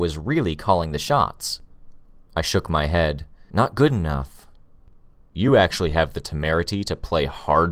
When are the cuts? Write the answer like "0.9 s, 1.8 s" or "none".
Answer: none